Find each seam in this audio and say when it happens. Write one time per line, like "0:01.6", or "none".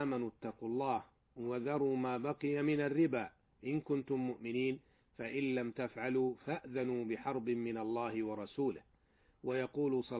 none